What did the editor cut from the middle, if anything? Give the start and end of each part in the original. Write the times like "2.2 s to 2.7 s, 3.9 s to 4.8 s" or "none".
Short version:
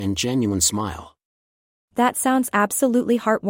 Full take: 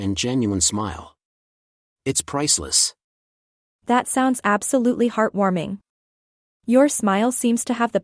1.8 s to 3.7 s